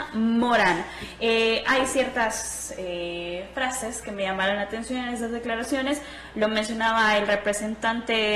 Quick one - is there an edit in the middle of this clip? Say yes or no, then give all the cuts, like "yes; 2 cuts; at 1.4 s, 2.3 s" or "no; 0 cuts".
no; 0 cuts